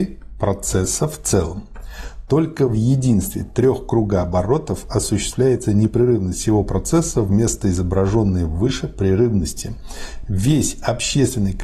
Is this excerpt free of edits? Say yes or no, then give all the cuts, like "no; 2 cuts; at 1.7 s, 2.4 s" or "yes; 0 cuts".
yes; 0 cuts